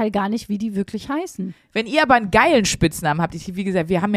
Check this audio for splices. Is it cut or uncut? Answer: uncut